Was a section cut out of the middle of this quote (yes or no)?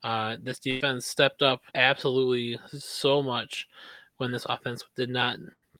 yes